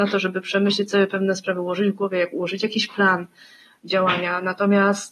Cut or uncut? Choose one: uncut